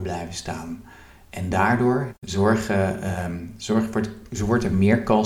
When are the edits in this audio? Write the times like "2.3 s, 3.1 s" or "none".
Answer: 2.1 s